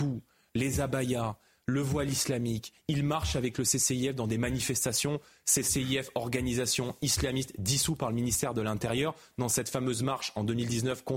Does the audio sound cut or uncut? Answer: uncut